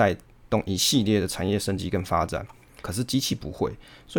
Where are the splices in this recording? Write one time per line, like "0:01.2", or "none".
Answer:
0:02.8